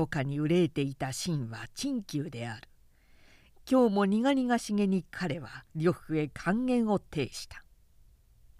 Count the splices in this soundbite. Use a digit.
1